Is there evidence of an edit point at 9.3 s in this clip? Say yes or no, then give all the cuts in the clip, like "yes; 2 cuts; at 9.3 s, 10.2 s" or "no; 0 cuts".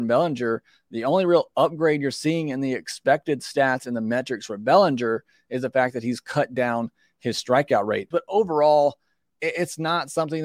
no; 1 cut; at 8.1 s